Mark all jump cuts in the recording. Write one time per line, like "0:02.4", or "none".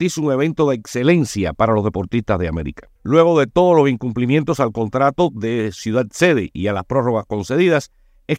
0:03.0